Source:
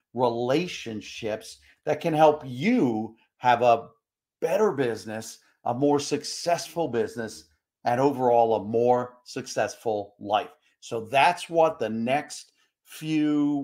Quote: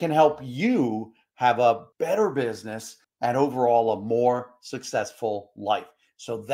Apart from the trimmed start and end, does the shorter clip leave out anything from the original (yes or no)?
yes